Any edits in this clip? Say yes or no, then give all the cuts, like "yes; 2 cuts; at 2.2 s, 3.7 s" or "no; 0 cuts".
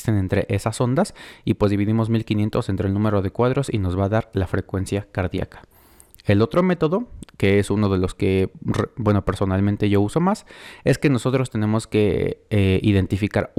no; 0 cuts